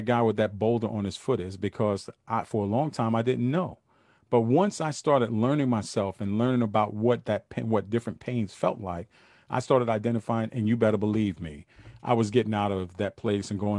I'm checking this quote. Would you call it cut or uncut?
uncut